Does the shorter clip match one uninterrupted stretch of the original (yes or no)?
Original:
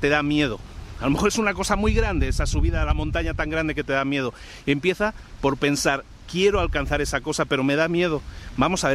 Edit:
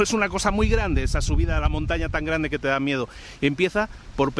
yes